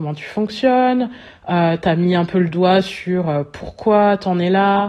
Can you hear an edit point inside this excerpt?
no; 0 cuts

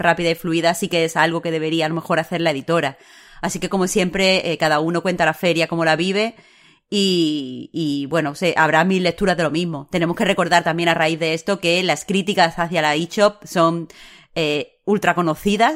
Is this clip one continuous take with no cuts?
yes; 0 cuts

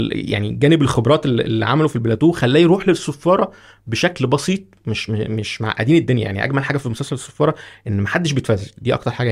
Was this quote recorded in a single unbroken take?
yes; 0 cuts

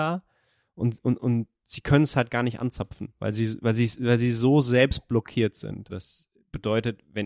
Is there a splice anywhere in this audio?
yes; 1 cut; at 5.9 s

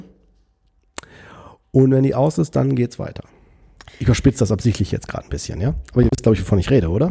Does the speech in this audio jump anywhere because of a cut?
no; 0 cuts

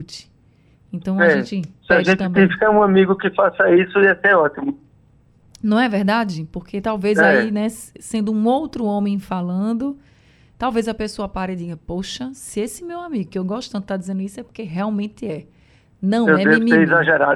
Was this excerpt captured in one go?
yes; 0 cuts

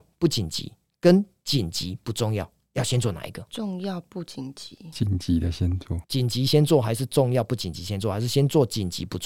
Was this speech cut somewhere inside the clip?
no; 0 cuts

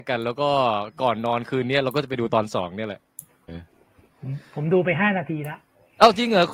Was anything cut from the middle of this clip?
yes; 1 cut; at 3.5 s

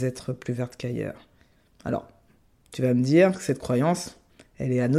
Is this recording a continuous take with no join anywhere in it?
yes; 0 cuts

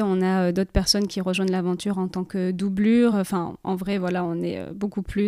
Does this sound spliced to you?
no; 0 cuts

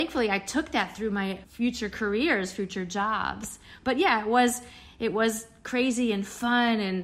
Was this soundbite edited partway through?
no; 0 cuts

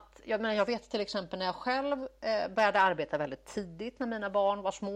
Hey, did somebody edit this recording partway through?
no; 0 cuts

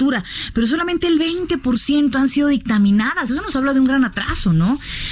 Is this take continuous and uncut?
yes; 0 cuts

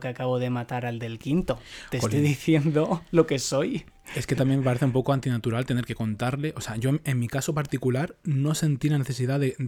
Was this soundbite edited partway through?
no; 0 cuts

